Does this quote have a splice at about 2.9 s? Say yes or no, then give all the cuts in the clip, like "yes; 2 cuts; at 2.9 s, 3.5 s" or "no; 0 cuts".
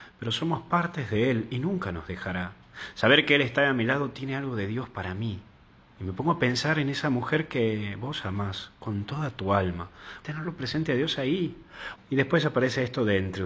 no; 2 cuts; at 10.2 s, 12.0 s